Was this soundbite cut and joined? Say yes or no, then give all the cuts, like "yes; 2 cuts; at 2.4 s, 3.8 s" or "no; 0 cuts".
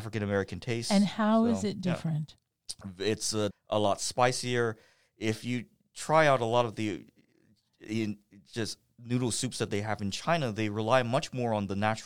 yes; 1 cut; at 3.5 s